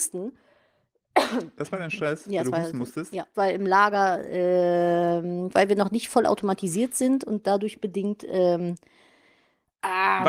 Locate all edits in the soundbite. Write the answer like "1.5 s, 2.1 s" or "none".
3.3 s, 5.5 s